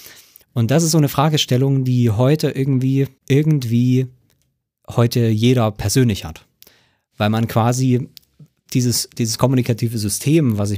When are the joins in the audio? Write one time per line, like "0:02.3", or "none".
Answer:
0:03.2